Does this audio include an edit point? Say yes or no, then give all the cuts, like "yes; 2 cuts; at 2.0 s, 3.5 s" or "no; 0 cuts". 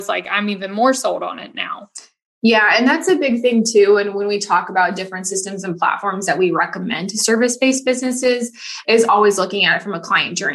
no; 0 cuts